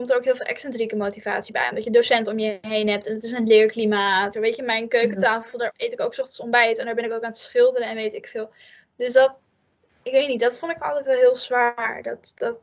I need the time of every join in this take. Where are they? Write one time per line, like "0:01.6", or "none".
0:04.3
0:10.0